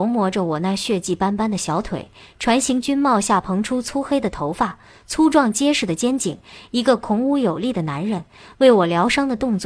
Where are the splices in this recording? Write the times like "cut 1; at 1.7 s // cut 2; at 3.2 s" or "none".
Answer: none